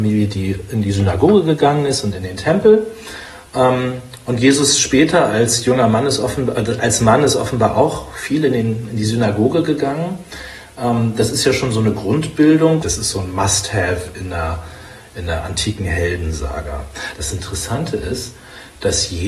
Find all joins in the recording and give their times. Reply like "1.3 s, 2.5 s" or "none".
12.8 s, 17.1 s